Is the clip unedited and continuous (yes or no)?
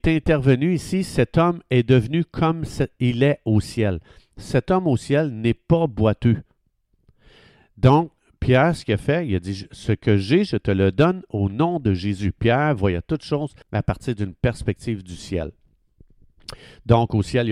no